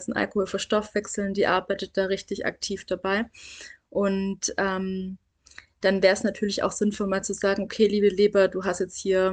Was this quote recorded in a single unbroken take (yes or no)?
yes